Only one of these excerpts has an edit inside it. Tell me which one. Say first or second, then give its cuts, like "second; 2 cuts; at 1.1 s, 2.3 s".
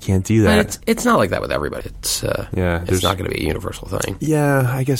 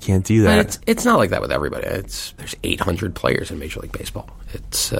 first; 1 cut; at 1.8 s